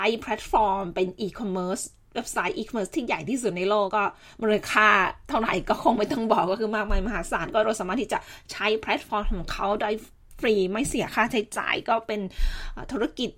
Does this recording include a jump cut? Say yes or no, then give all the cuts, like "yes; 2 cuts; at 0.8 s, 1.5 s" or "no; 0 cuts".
yes; 1 cut; at 3.9 s